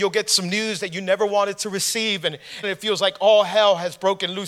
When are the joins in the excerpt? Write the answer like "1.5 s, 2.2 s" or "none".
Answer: 2.6 s